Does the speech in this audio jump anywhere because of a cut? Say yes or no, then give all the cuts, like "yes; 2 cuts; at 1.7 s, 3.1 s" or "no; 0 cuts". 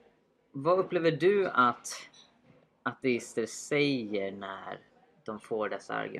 no; 0 cuts